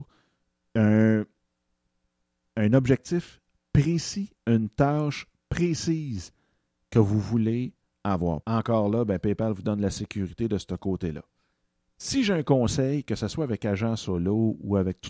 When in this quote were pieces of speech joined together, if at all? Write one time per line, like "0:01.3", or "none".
0:08.4